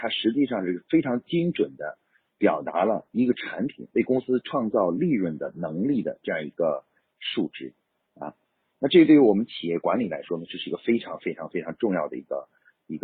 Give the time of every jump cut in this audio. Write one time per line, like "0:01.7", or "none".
none